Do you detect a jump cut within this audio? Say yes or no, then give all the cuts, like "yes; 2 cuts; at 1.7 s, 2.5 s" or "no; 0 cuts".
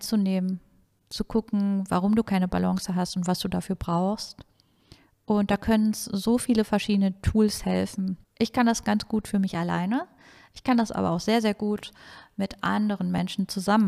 yes; 1 cut; at 8.2 s